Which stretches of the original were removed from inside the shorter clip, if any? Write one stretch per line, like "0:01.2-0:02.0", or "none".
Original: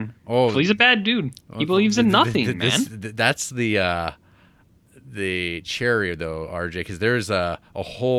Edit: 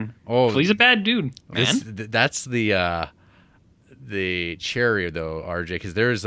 0:01.5-0:02.6